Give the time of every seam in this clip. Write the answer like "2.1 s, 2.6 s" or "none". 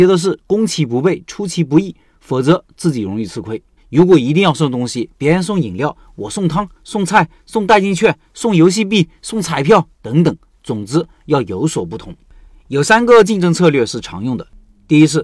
3.8 s, 6.8 s